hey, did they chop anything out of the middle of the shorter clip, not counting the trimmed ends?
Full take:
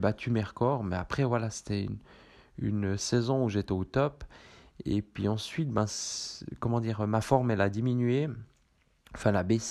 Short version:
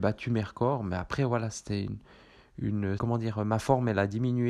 yes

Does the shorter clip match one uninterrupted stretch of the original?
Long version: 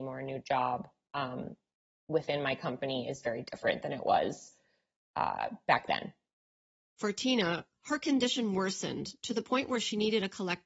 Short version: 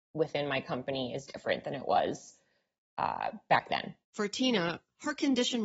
no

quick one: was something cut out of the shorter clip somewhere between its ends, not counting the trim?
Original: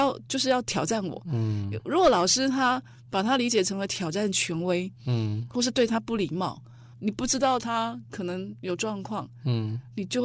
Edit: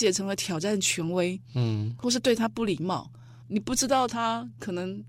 no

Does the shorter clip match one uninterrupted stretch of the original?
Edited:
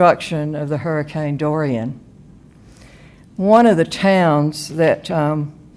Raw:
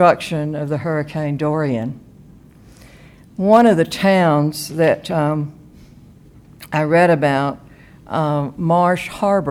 yes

